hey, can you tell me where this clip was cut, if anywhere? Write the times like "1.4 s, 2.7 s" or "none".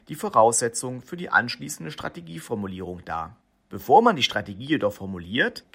none